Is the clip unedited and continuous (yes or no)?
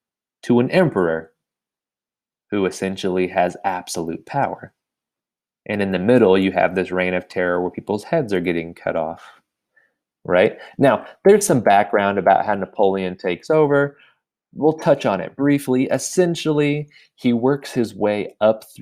yes